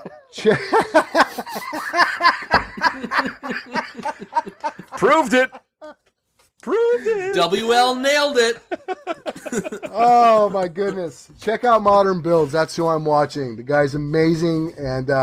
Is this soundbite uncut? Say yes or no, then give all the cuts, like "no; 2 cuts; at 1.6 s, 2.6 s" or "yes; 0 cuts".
yes; 0 cuts